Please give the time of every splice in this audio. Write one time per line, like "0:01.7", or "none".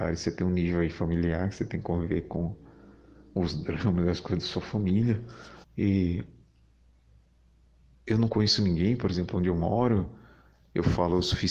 0:05.6